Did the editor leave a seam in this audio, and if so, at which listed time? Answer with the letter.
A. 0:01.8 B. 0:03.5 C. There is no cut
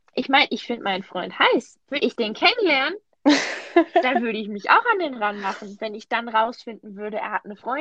A